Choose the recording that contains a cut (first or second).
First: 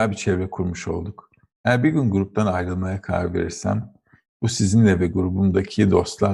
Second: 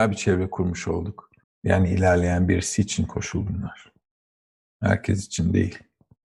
second